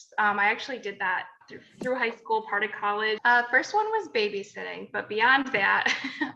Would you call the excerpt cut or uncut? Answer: cut